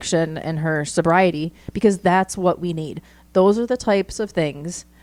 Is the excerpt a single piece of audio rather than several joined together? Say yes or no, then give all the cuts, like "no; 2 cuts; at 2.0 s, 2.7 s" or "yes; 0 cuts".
yes; 0 cuts